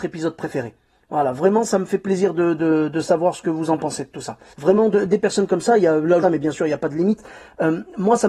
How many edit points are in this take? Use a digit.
2